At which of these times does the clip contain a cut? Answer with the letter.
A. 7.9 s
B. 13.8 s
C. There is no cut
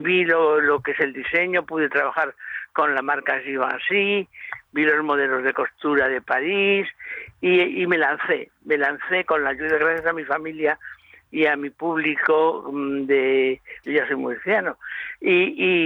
B